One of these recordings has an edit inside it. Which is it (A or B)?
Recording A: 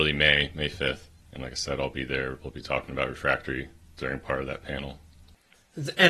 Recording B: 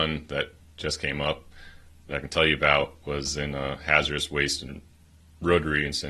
A